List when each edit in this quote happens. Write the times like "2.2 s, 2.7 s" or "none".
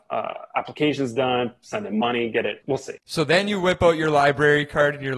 2.6 s